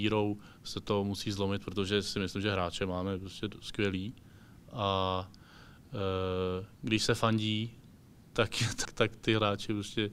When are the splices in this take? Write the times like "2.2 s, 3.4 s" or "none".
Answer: 8.8 s